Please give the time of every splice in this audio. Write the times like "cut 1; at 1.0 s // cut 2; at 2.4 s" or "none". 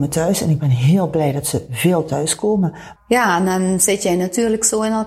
cut 1; at 3.0 s